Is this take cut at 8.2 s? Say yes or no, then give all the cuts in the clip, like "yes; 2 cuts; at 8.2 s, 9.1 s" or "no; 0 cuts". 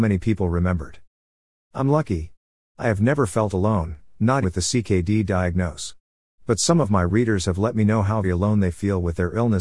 yes; 2 cuts; at 4.4 s, 8.2 s